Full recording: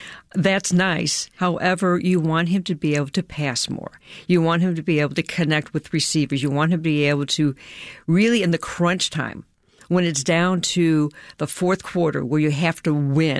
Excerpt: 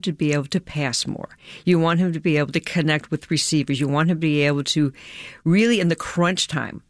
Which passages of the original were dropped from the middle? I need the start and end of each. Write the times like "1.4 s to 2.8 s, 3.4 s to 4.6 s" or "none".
none